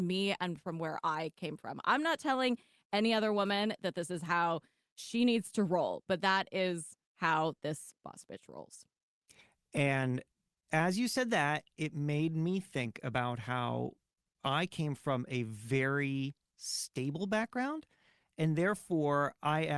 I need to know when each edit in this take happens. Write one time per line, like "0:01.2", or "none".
none